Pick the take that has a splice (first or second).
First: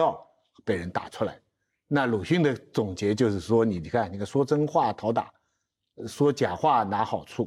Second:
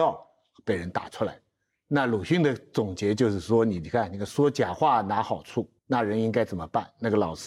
second